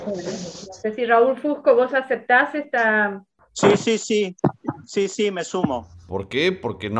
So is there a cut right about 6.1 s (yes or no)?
yes